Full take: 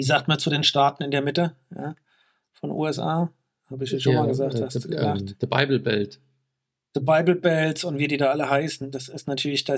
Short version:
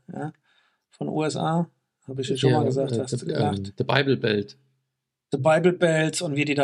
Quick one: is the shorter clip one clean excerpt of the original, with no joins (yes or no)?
yes